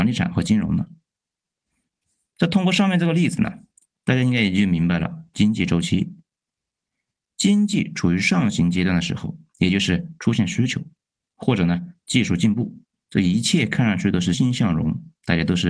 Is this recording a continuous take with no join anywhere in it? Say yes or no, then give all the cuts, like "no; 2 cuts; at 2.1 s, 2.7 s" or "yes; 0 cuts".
no; 1 cut; at 14.3 s